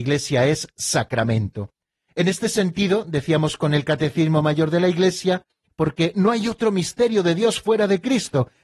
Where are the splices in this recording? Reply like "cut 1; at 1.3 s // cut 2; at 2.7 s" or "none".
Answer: cut 1; at 2.1 s // cut 2; at 5.7 s